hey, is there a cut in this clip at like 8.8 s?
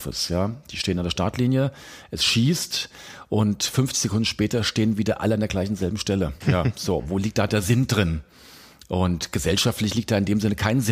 no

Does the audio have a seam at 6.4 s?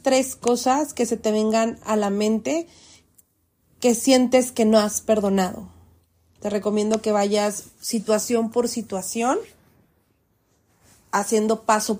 yes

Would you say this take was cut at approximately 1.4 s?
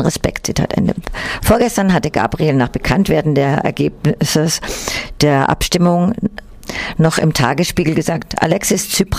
no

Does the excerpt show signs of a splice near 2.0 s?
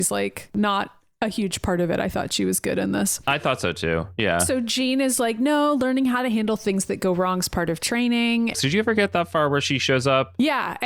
no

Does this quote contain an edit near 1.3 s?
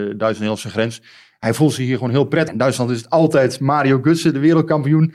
no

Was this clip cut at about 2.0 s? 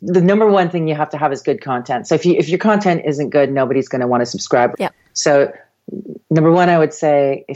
no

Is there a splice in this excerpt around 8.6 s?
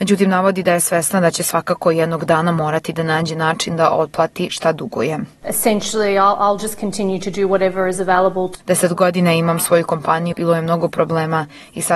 yes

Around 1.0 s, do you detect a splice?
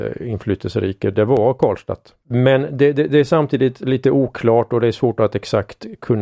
no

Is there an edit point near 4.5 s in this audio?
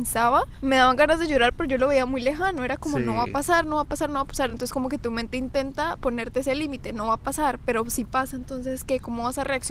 no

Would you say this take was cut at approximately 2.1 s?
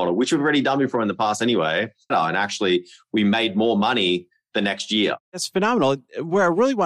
yes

